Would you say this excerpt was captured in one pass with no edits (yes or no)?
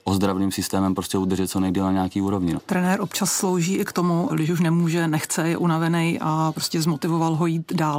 no